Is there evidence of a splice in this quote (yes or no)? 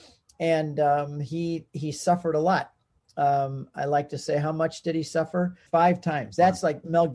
yes